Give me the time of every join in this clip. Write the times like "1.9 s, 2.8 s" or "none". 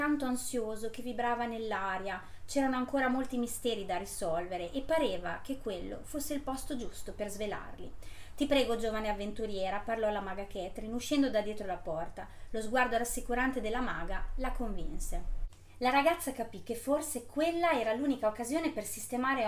none